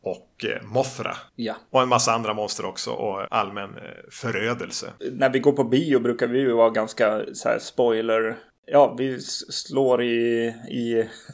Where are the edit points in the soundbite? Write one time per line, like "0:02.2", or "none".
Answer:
0:03.2